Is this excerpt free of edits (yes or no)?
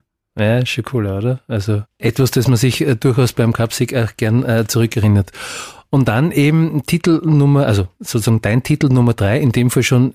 yes